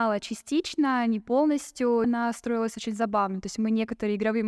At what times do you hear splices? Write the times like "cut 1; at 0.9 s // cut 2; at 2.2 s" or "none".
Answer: cut 1; at 2.0 s